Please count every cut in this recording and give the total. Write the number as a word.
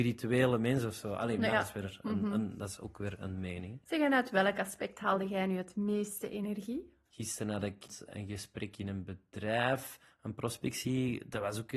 two